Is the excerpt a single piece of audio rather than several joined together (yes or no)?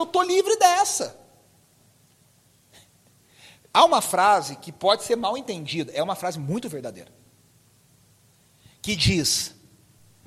yes